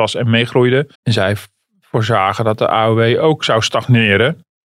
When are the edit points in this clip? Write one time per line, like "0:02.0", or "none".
0:00.9